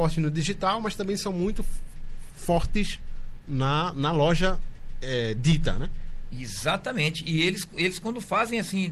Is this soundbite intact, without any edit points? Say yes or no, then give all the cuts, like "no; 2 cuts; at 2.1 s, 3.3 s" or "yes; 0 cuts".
yes; 0 cuts